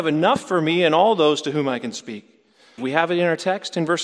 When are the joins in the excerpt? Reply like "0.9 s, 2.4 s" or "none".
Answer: 2.8 s